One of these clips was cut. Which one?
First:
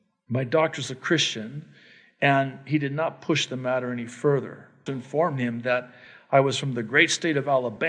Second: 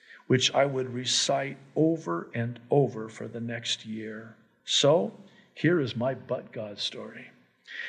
first; 1 cut; at 4.9 s

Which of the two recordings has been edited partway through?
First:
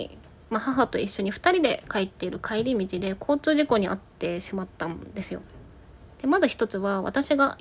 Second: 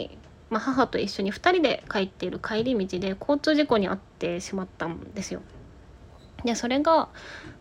first; 1 cut; at 6.1 s

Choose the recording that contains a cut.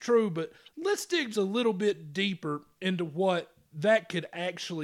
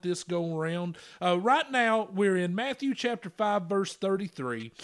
first; 1 cut; at 1.3 s

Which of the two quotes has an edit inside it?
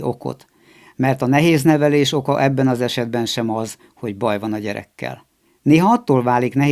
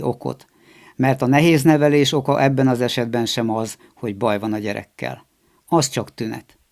first; 1 cut; at 5.5 s

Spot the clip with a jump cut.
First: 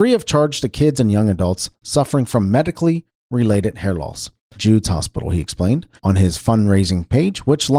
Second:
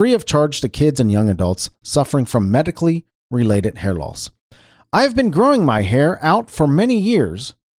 first; 2 cuts; at 4.5 s, 6.0 s

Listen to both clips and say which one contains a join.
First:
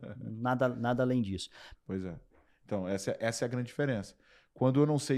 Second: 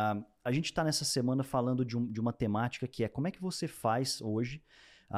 first; 1 cut; at 1.8 s

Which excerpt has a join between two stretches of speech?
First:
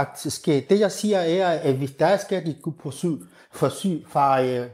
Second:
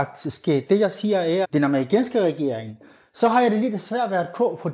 second; 1 cut; at 1.4 s

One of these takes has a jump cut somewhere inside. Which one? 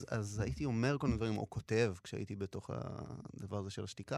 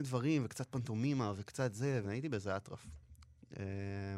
second; 1 cut; at 2.0 s

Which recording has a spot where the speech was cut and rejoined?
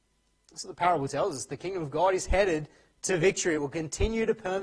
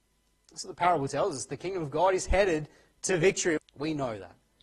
second; 1 cut; at 3.6 s

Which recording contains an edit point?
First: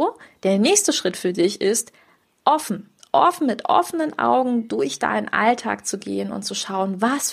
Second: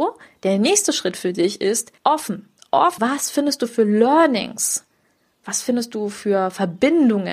second; 2 cuts; at 2.0 s, 3.0 s

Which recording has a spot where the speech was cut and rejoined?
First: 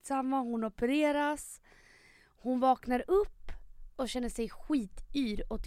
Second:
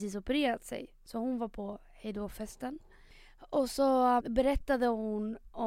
second; 1 cut; at 4.2 s

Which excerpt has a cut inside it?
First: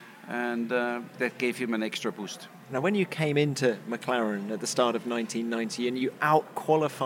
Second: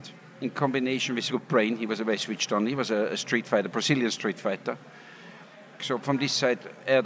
second; 2 cuts; at 1.3 s, 5.8 s

